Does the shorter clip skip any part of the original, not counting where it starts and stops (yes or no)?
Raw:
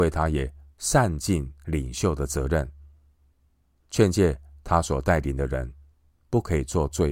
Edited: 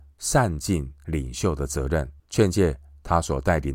yes